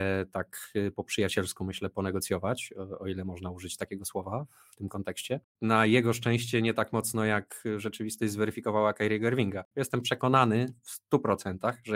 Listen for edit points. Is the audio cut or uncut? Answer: cut